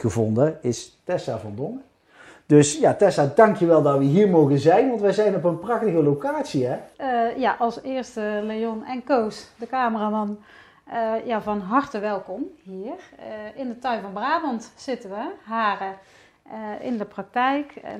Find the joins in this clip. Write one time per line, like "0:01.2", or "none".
0:06.9